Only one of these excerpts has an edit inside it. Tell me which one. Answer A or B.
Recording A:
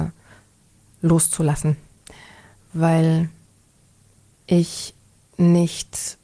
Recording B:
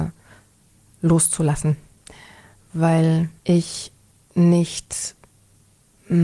B